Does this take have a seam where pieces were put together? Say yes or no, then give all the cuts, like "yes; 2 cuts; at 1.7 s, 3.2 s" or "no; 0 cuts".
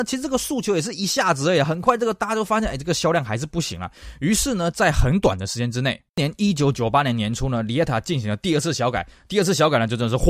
yes; 1 cut; at 6.1 s